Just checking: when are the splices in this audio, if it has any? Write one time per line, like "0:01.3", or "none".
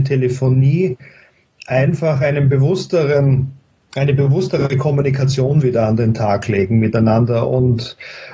none